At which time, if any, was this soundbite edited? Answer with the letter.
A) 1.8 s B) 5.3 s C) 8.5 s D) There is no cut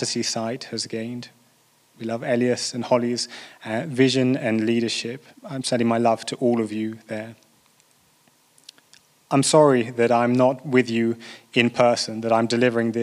B